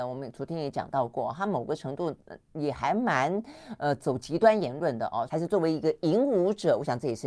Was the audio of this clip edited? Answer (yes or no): yes